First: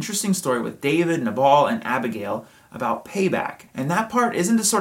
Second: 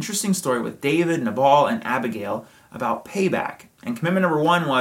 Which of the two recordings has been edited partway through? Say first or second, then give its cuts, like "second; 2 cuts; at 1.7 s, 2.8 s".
first; 1 cut; at 3.7 s